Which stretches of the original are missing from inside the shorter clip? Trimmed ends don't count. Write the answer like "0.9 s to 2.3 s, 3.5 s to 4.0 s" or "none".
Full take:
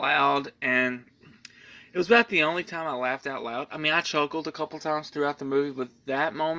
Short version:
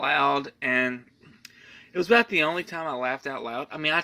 none